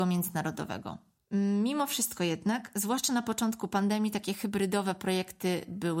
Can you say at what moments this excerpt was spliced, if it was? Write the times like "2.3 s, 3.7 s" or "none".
none